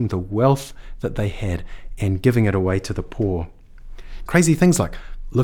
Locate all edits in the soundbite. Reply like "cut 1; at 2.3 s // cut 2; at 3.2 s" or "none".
cut 1; at 4.3 s